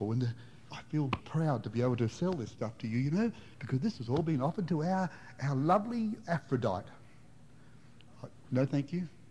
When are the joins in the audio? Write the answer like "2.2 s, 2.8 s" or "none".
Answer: 1.2 s

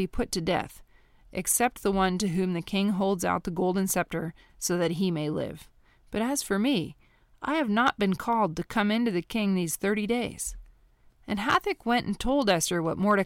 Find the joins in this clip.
11.1 s

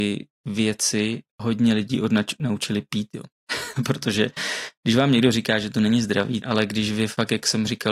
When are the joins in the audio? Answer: 6.4 s

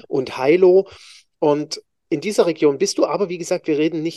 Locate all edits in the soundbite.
none

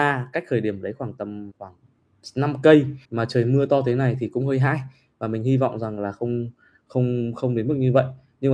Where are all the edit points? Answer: 1.5 s, 3.0 s

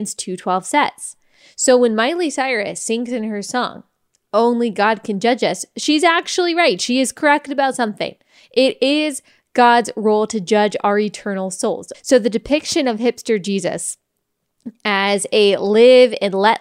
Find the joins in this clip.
11.9 s

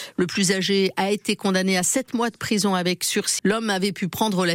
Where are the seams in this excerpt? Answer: 3.4 s

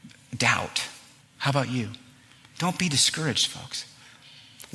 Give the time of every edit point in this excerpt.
1.2 s

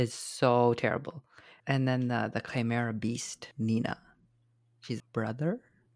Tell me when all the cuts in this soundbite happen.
1.6 s, 3.5 s, 5.0 s

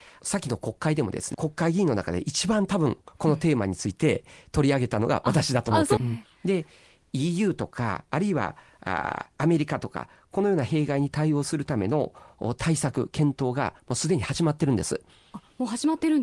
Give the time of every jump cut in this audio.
1.3 s, 6.0 s

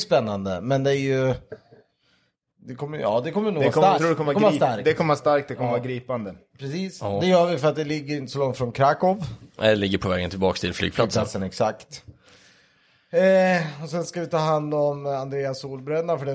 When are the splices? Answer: 4.0 s

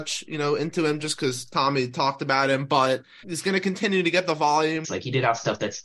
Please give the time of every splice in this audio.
3.2 s, 4.8 s

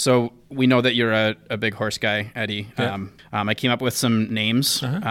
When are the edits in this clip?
3.2 s

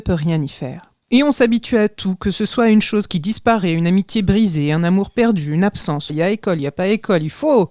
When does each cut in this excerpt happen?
1.0 s, 6.1 s

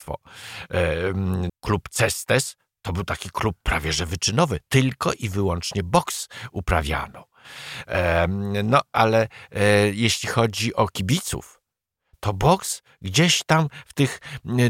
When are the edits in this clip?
1.5 s

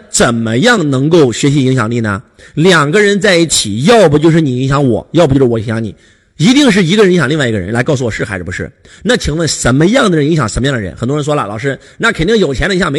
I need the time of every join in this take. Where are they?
none

